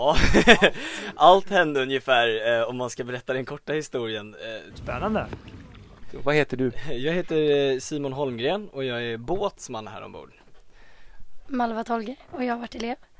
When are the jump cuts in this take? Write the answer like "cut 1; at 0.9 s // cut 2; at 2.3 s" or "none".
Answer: cut 1; at 4.7 s // cut 2; at 11.4 s